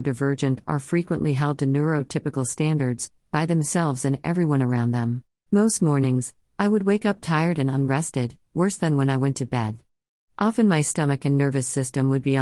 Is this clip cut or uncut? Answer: cut